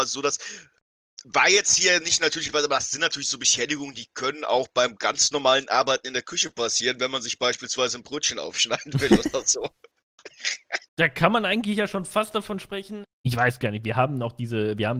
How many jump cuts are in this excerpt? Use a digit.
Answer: 2